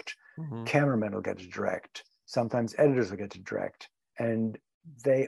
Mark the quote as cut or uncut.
uncut